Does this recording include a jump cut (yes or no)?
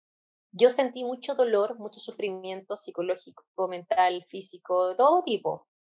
no